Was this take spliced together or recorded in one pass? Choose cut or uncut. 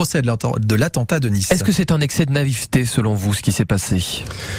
uncut